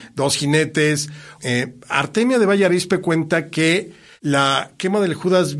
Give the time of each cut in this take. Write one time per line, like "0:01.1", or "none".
0:01.4

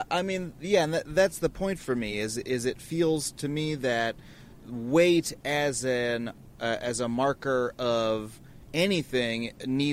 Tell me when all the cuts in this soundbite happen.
none

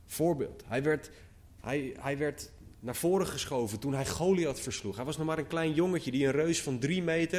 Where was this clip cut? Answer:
none

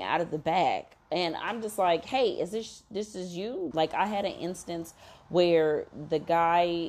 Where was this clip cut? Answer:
0:03.7

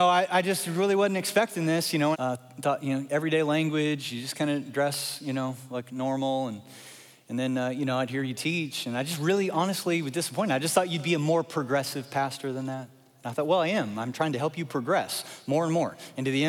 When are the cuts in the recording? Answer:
0:02.1

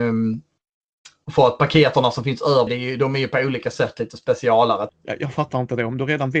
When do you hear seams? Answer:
0:02.7
0:04.9

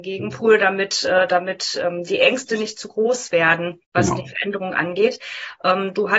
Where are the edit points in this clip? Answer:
0:03.8

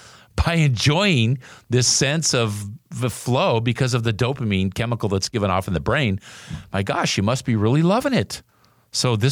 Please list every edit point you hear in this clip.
none

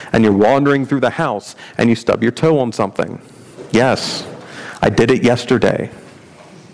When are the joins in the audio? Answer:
none

